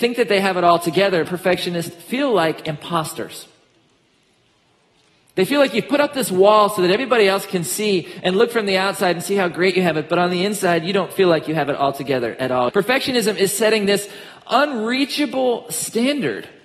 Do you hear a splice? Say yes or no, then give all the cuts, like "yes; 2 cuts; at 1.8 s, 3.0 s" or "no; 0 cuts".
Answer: yes; 2 cuts; at 1.2 s, 12.7 s